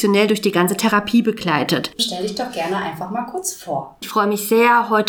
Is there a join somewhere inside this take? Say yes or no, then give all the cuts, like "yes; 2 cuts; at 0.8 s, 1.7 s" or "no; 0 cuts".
yes; 2 cuts; at 1.9 s, 4.0 s